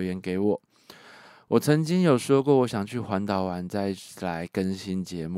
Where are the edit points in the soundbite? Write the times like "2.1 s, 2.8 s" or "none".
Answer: none